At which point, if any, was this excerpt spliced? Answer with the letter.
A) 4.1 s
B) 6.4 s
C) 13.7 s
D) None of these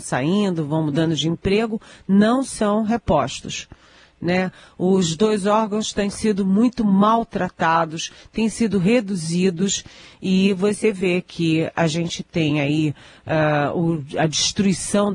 D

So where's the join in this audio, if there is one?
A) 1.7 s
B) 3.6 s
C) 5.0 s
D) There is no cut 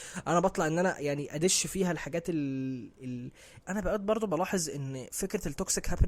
B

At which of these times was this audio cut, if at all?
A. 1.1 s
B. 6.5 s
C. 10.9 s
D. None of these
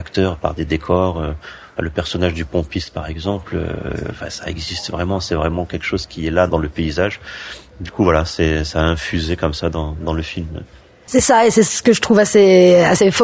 B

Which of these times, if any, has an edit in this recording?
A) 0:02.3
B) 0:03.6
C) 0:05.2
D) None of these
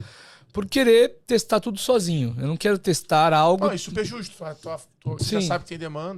C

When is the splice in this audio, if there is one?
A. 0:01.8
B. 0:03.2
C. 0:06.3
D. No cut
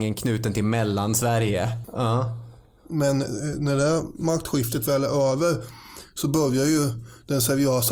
A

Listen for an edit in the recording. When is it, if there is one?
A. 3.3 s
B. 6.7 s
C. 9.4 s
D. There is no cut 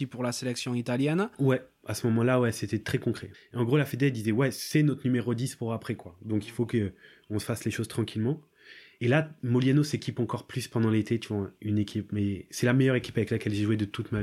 A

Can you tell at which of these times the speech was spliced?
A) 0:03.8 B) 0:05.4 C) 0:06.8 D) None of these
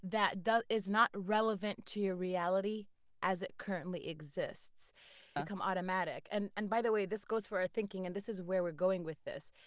B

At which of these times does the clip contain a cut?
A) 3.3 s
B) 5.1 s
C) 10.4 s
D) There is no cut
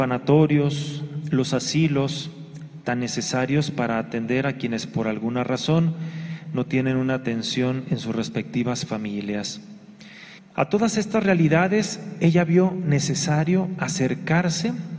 C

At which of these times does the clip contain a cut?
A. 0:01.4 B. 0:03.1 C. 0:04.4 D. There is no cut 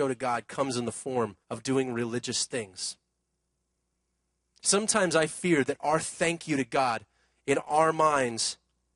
A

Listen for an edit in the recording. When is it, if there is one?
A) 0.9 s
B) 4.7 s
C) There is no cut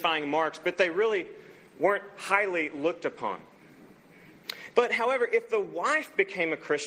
B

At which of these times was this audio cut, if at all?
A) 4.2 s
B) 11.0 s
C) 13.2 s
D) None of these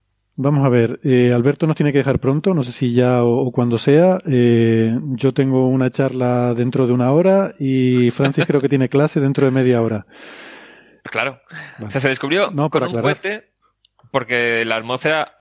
B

